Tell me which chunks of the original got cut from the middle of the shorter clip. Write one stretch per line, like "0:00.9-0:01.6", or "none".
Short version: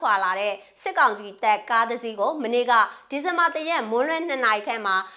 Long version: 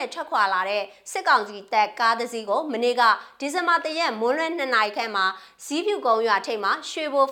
none